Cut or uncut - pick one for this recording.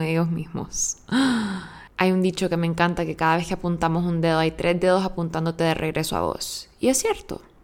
cut